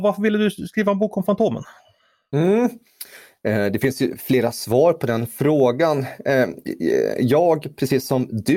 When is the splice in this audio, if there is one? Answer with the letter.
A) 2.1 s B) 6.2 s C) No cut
C